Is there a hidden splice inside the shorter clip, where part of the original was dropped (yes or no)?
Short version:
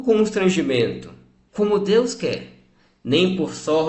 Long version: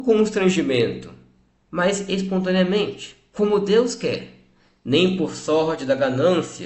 yes